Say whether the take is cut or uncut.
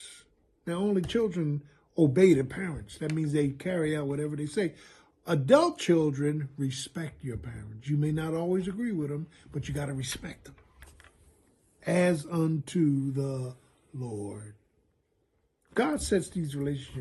uncut